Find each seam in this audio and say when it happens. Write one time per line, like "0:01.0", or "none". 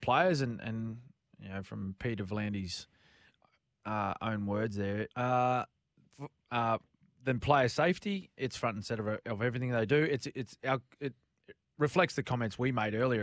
0:05.1